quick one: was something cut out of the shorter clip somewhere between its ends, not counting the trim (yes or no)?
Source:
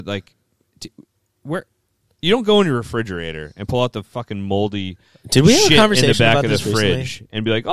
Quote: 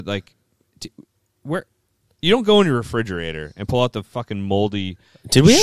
no